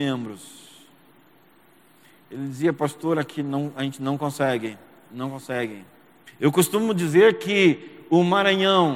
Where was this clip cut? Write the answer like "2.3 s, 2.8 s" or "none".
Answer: 6.3 s